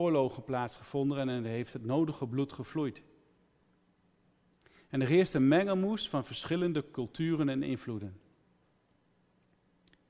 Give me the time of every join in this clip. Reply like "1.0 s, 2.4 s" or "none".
none